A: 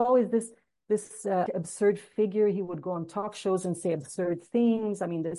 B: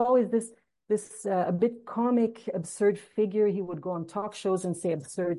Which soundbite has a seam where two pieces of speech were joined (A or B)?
A